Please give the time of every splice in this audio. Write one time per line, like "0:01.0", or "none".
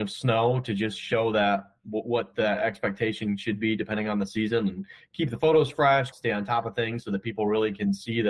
0:06.1